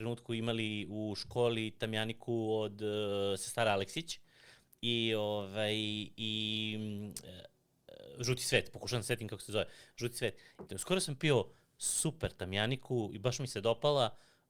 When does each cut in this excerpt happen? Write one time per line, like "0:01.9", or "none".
0:10.7